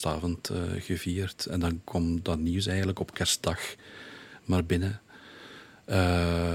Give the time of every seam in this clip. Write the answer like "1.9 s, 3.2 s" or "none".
none

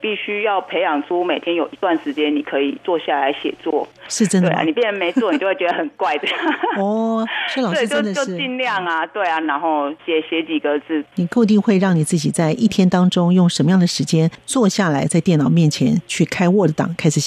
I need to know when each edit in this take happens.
4.0 s, 9.4 s

